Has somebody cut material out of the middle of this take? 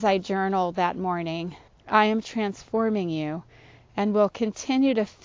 yes; 1 cut; at 1.7 s

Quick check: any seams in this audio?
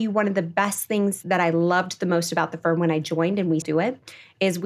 yes; 1 cut; at 3.6 s

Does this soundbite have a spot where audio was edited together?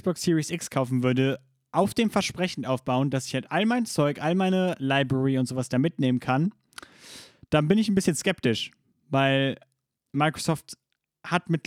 no; 0 cuts

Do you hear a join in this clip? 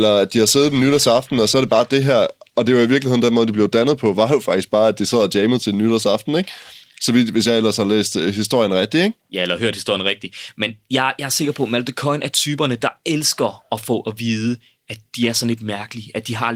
no; 0 cuts

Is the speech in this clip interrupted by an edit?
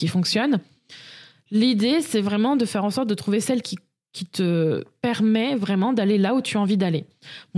no; 0 cuts

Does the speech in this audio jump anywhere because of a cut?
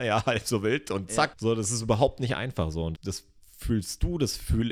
yes; 2 cuts; at 1.3 s, 2.9 s

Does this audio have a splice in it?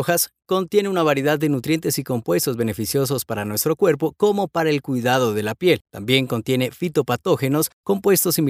yes; 1 cut; at 5.8 s

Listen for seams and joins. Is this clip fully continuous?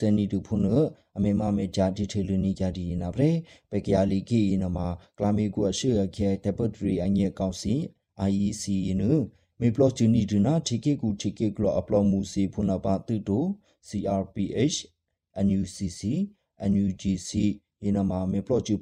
yes; 0 cuts

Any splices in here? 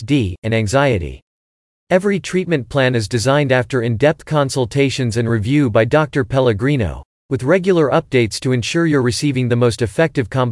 no; 0 cuts

